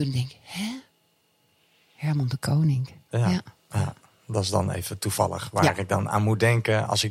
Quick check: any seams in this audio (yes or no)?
yes